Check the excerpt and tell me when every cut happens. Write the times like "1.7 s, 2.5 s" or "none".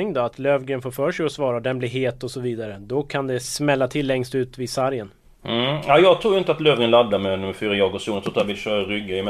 none